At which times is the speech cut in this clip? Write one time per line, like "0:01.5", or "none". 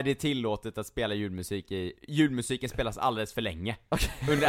0:01.9

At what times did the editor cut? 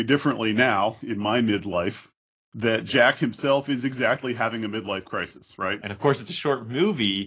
0:05.8

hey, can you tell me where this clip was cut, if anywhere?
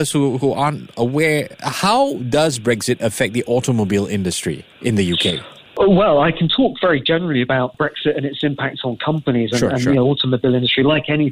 none

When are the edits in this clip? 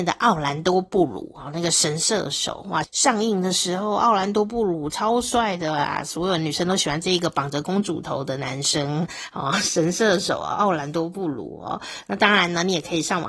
0:02.8

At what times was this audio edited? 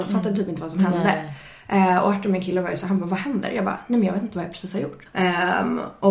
0:05.1

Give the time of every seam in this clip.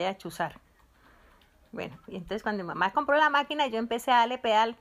0:02.1

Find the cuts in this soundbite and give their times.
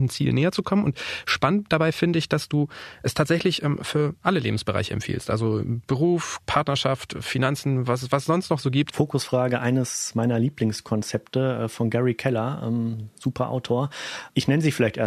0:06.4
0:08.9

